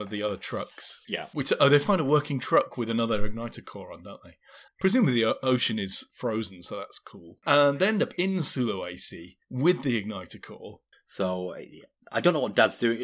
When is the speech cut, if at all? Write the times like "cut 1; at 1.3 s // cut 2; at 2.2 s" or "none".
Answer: cut 1; at 4.7 s // cut 2; at 10.9 s